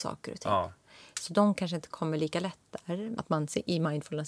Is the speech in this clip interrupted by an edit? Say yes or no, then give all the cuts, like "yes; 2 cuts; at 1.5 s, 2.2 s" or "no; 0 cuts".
yes; 1 cut; at 3.2 s